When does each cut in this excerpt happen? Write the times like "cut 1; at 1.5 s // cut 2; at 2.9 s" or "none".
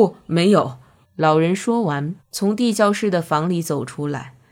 cut 1; at 1.0 s // cut 2; at 2.2 s